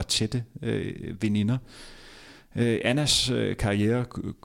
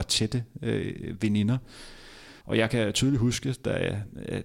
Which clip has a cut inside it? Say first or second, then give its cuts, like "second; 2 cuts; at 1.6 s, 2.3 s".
second; 1 cut; at 2.4 s